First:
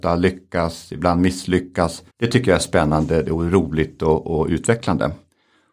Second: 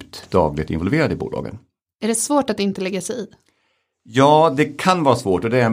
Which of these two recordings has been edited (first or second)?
first